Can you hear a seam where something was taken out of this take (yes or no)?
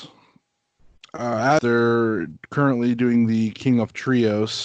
yes